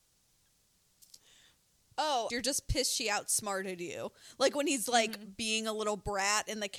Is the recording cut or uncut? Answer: cut